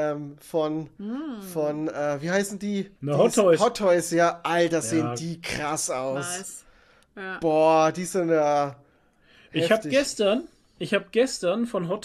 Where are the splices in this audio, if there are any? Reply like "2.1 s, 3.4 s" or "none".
3.0 s